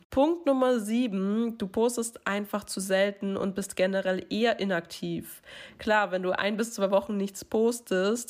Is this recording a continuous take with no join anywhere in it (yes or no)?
yes